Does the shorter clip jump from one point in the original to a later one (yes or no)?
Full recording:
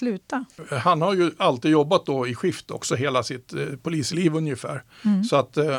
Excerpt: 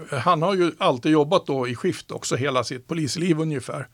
yes